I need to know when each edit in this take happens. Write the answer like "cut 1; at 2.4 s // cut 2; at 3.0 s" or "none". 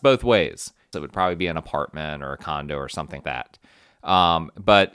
cut 1; at 0.9 s // cut 2; at 3.2 s